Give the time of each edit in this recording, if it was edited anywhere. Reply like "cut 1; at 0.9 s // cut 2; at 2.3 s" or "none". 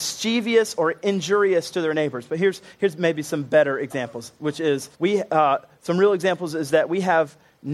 cut 1; at 4.9 s